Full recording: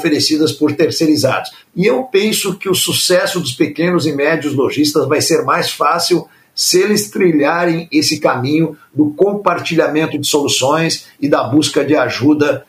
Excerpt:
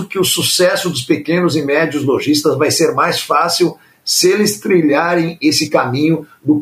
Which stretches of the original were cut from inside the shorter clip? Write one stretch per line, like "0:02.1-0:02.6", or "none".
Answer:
none